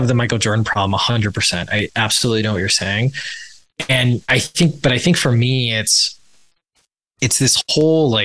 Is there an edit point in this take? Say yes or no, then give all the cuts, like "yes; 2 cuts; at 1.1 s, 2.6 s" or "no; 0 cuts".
yes; 1 cut; at 4.2 s